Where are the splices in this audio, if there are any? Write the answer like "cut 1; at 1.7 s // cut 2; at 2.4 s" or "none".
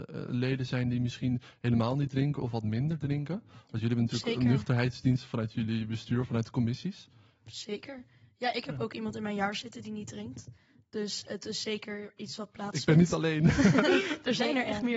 none